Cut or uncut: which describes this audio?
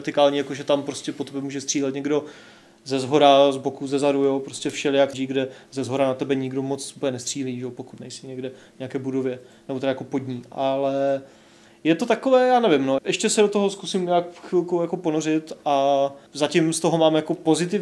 cut